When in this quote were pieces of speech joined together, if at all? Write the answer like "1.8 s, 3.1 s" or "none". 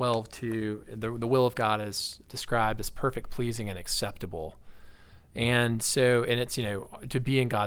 2.2 s